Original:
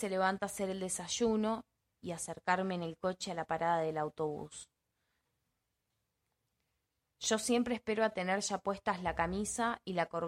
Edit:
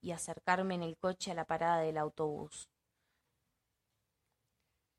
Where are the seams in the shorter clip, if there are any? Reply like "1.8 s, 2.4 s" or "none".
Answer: none